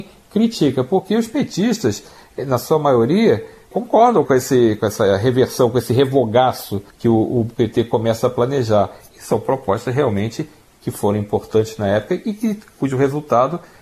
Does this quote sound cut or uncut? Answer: cut